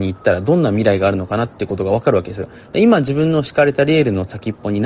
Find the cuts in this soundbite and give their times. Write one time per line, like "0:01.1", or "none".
none